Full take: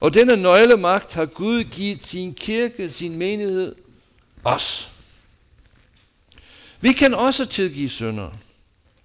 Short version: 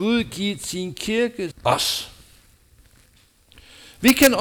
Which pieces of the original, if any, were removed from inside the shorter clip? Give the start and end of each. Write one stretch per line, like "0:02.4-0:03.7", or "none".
0:02.9-0:04.3